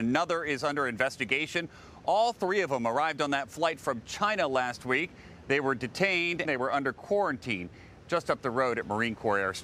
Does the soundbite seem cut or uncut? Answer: cut